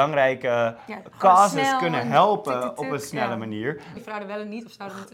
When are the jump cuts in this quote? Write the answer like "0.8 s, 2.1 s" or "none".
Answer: 3.9 s